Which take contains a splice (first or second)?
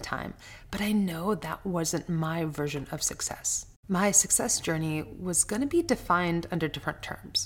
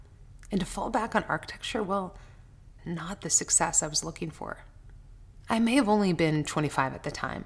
second